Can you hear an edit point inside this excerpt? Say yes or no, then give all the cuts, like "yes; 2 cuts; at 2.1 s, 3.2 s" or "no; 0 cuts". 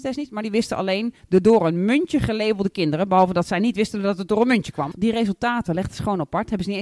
yes; 1 cut; at 4.9 s